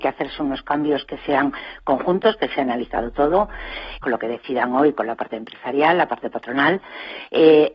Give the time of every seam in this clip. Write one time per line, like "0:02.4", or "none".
0:04.0